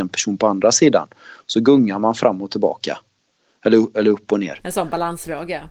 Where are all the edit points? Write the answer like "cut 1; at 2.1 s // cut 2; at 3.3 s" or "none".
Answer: none